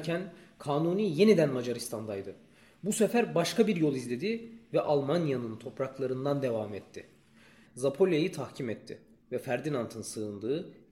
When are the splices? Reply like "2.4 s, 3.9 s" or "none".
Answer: 7.7 s